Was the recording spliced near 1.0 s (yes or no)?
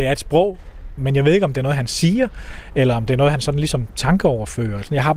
yes